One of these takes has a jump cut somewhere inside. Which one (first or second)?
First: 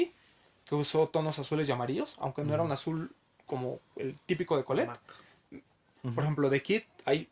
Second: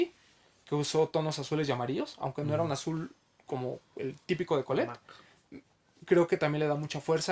first